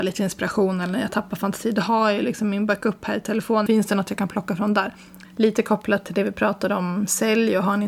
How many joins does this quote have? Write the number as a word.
two